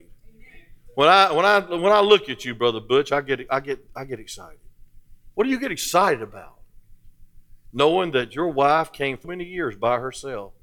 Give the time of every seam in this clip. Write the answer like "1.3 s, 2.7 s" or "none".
5.3 s, 7.7 s, 9.2 s